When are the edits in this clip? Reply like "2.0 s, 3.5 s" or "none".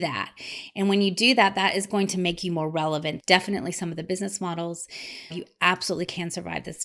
3.2 s, 5.3 s